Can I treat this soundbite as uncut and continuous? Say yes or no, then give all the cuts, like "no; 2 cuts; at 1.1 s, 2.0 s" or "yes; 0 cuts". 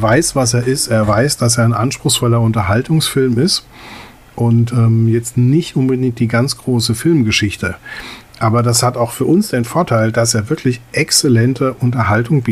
yes; 0 cuts